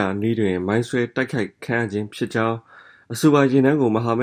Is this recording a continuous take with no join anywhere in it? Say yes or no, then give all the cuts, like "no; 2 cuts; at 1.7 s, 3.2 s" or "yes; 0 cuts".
yes; 0 cuts